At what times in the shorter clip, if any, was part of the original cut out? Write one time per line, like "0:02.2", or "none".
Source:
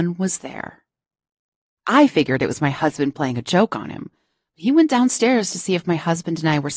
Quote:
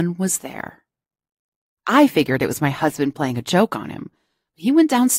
none